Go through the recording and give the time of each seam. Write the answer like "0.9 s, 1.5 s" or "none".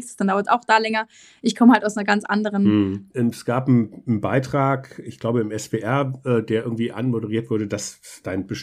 3.1 s

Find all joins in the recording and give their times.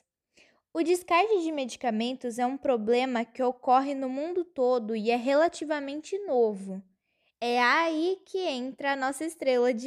7.3 s

